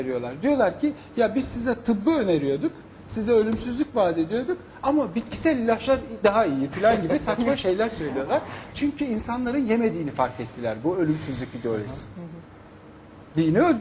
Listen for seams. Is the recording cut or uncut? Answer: cut